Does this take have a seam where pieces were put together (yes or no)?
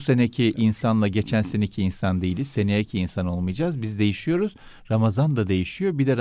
no